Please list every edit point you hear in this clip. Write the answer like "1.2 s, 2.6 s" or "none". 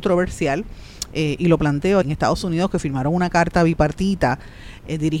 2.0 s